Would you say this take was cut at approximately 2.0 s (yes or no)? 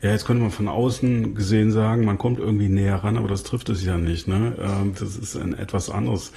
no